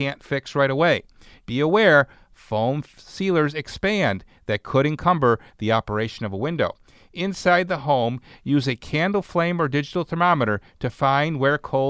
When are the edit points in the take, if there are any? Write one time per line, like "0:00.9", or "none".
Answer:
0:01.4